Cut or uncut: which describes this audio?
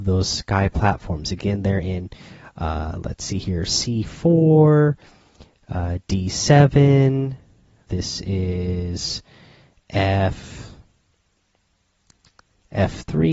cut